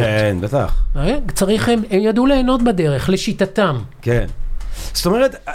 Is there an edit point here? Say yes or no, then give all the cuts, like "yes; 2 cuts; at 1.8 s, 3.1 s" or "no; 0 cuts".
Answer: no; 0 cuts